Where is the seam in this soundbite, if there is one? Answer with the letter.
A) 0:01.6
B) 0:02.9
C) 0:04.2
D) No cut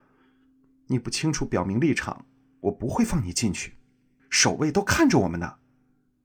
C